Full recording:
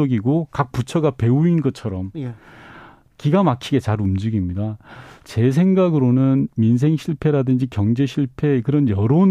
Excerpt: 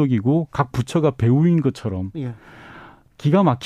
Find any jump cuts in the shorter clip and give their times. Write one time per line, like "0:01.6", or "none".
none